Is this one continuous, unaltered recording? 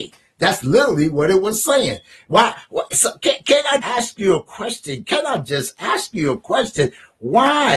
no; 1 cut; at 3.8 s

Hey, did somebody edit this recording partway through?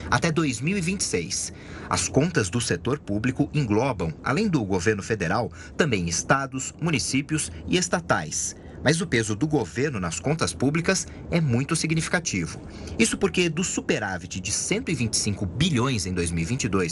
no; 0 cuts

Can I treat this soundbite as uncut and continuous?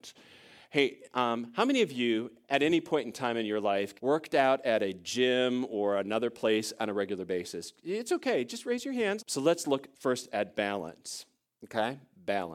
no; 2 cuts; at 4.0 s, 9.2 s

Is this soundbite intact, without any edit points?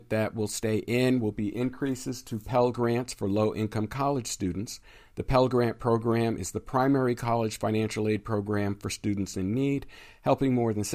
yes; 0 cuts

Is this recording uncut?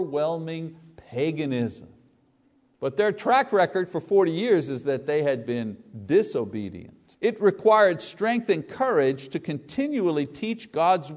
no; 2 cuts; at 2.7 s, 7.1 s

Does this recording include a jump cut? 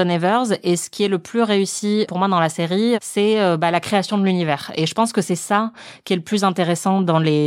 no; 0 cuts

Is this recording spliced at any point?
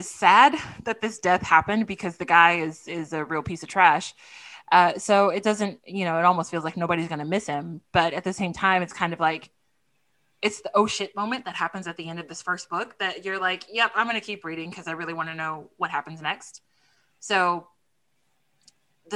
no; 0 cuts

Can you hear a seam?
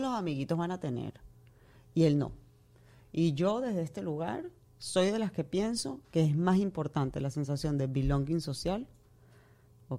no; 0 cuts

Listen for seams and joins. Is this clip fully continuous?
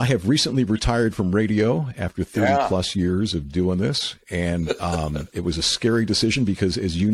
yes; 0 cuts

